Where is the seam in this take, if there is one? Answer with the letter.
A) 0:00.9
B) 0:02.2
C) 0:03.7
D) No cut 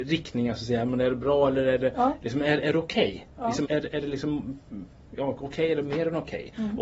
C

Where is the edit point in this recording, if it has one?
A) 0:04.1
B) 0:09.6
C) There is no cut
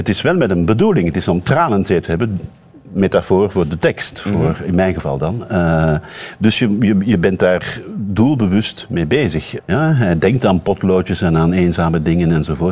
B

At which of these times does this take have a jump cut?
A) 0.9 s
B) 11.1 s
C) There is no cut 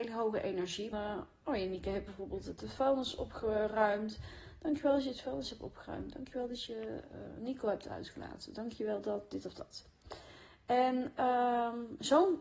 A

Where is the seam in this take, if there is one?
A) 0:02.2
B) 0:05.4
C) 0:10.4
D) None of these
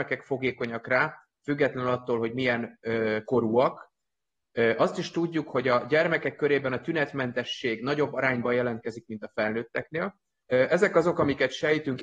C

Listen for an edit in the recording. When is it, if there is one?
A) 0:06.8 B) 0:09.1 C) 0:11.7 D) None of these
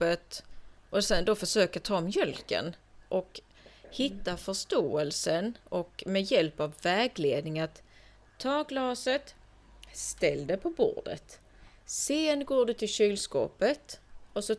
D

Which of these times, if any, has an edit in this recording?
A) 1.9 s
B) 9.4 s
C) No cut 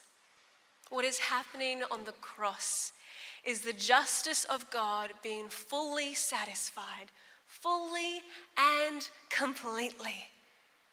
C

